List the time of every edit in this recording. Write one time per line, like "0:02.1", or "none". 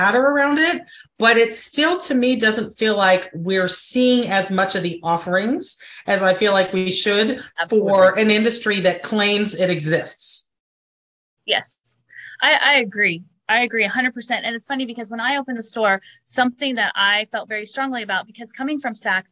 none